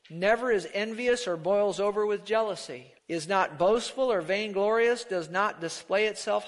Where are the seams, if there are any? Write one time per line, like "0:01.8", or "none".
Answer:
0:03.0